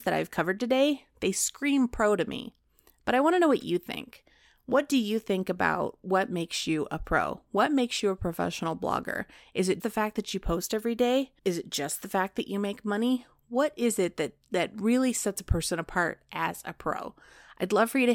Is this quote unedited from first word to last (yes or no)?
no